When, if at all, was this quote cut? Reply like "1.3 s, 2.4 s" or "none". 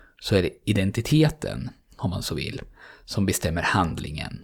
1.9 s